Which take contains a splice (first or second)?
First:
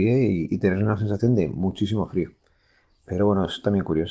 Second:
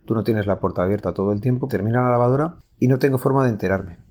second